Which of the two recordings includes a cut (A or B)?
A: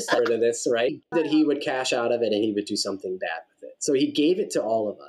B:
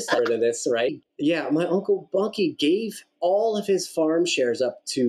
A